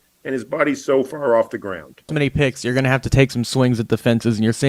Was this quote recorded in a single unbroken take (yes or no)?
no